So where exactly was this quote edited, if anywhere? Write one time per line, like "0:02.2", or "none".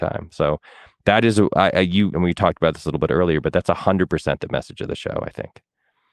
0:02.1